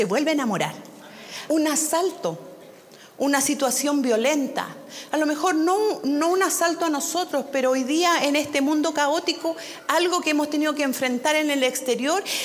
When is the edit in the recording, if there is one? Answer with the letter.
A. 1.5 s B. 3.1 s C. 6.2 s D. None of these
A